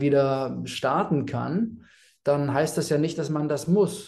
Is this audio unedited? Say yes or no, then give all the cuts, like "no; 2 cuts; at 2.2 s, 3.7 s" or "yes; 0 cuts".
yes; 0 cuts